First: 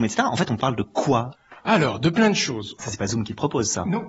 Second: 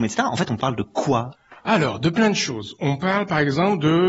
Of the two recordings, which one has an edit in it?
first; 1 cut; at 2.8 s

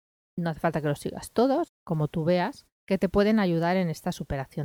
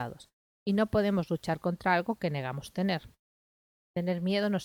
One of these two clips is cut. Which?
first; 2 cuts; at 1.7 s, 2.8 s

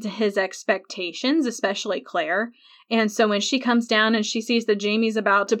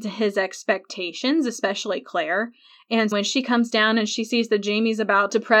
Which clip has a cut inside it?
second; 1 cut; at 3.1 s

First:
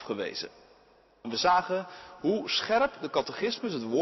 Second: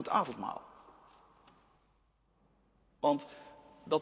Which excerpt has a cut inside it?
first; 1 cut; at 1.2 s

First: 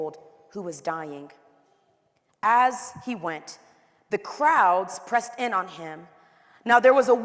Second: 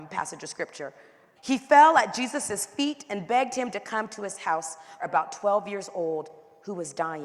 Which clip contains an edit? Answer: second; 2 cuts; at 1.4 s, 5.0 s

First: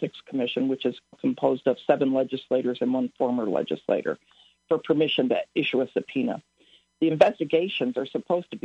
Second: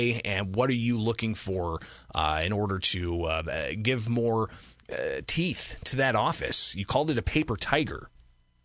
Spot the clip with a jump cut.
first; 1 cut; at 1.1 s

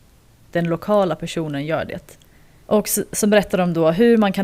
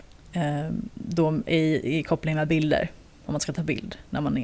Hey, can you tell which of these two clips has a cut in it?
first; 1 cut; at 2.6 s

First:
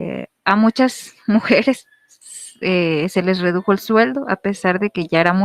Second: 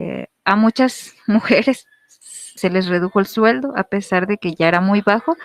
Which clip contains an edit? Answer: second; 1 cut; at 2.6 s

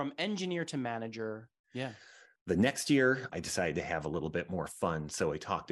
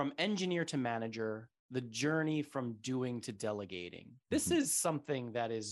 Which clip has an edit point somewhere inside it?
first; 2 cuts; at 1.6 s, 3.3 s

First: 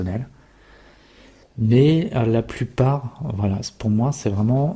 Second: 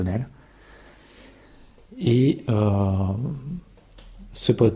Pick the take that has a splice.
first; 1 cut; at 1.4 s

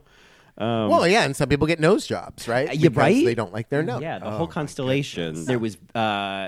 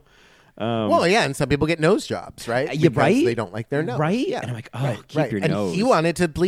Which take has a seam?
first; 2 cuts; at 4.0 s, 5.5 s

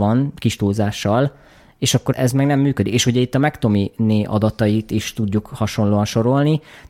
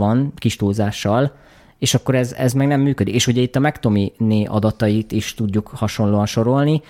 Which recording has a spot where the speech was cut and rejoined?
first; 1 cut; at 2.1 s

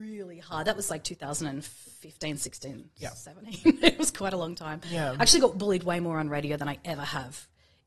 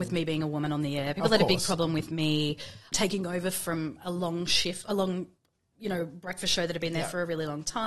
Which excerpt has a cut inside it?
second; 1 cut; at 2.9 s

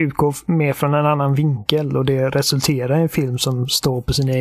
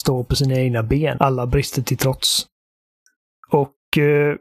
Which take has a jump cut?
second; 1 cut; at 1.2 s

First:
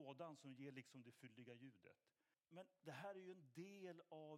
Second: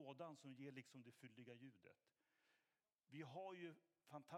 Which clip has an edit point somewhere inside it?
first; 1 cut; at 2.3 s

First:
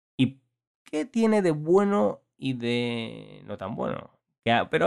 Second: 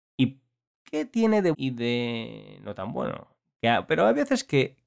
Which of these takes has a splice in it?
second; 1 cut; at 1.5 s

